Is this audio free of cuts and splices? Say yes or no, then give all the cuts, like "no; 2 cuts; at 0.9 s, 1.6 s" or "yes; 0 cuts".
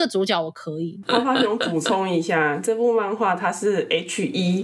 no; 1 cut; at 1.0 s